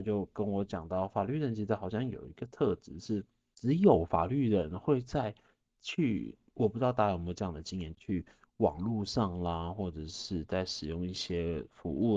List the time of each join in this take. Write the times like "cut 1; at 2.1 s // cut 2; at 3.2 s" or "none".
none